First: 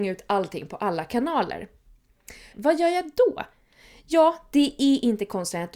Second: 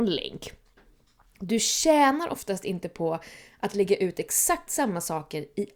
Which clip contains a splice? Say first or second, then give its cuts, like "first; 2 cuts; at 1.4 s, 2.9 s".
first; 1 cut; at 2.5 s